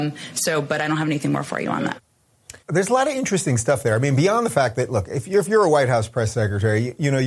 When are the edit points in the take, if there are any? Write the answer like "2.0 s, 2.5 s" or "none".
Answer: 2.6 s